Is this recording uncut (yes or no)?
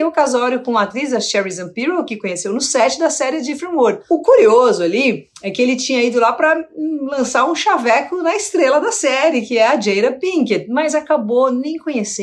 yes